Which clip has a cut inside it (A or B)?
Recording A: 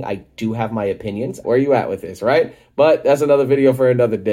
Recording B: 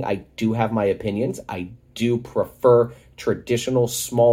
A